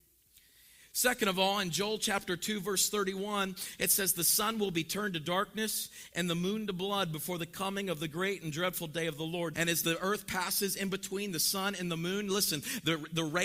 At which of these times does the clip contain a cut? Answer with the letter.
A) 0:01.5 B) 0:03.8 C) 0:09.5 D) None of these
C